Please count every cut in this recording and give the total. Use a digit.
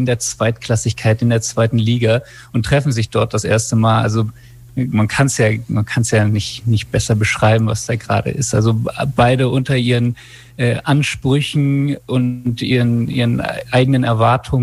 0